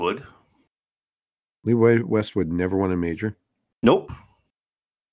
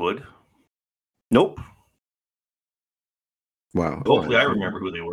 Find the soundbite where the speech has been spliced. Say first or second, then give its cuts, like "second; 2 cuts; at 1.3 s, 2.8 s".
second; 2 cuts; at 1.1 s, 4.1 s